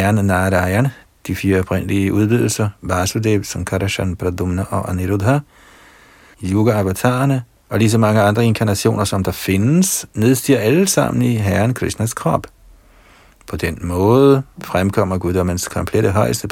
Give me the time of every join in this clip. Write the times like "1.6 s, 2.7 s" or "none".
6.3 s, 7.6 s